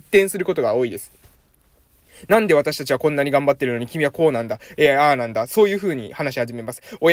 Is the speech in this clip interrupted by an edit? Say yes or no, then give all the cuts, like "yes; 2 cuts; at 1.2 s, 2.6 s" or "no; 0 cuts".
no; 0 cuts